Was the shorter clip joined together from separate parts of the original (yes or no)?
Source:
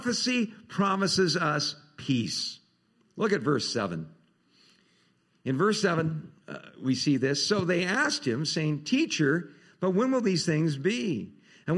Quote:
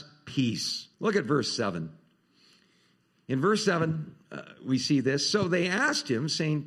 yes